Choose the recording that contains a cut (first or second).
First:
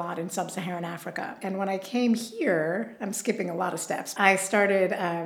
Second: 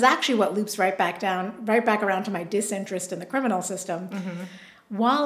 first